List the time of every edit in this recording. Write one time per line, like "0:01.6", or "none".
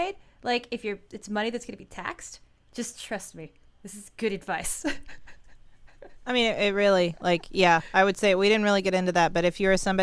0:02.7